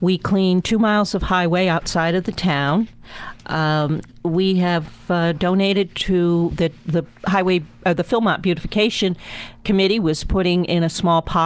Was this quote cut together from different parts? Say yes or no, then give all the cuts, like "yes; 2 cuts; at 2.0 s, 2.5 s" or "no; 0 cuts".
no; 0 cuts